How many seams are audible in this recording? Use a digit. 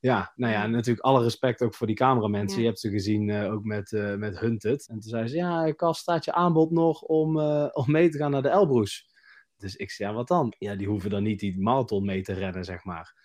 2